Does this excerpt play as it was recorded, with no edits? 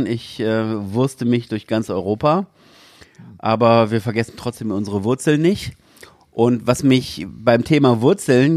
yes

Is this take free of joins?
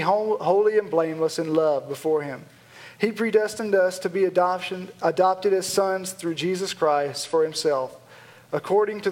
yes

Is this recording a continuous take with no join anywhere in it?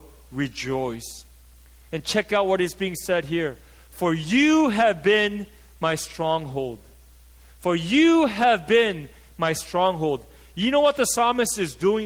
yes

